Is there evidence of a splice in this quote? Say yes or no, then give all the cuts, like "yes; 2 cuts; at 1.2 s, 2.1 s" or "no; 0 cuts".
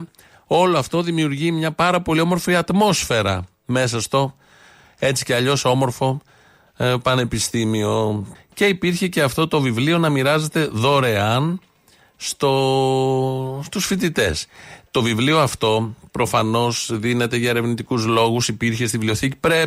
yes; 1 cut; at 8.3 s